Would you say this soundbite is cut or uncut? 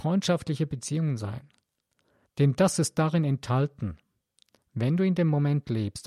cut